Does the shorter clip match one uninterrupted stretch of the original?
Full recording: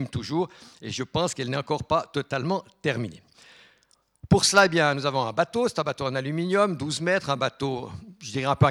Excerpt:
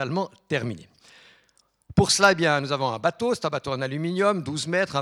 yes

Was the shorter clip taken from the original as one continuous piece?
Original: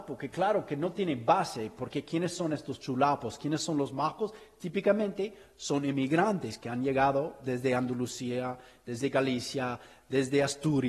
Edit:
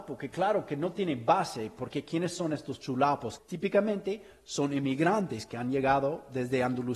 no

